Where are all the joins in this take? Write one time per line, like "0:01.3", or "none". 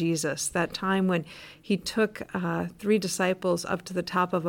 none